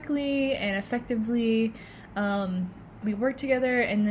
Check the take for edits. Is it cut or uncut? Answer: cut